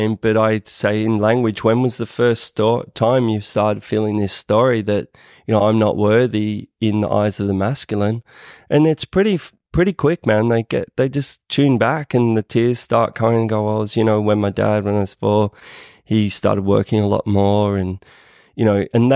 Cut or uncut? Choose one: uncut